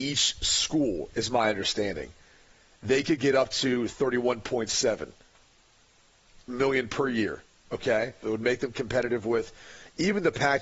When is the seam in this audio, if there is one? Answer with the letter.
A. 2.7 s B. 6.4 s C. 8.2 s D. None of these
C